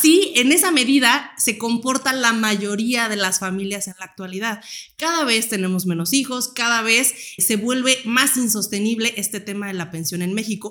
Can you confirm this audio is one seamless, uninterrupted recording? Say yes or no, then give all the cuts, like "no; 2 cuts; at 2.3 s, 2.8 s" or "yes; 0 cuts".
no; 1 cut; at 7.4 s